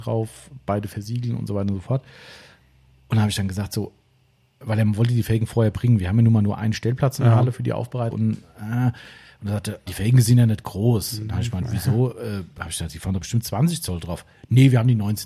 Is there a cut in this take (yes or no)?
yes